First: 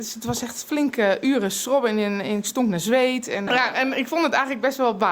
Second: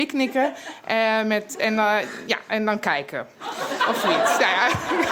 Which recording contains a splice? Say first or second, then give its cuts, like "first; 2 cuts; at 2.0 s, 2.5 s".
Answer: first; 1 cut; at 3.5 s